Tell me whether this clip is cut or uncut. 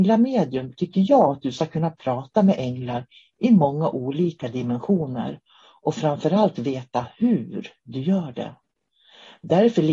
uncut